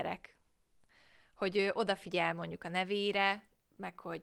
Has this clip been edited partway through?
no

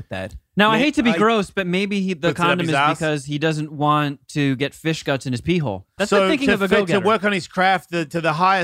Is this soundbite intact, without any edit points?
no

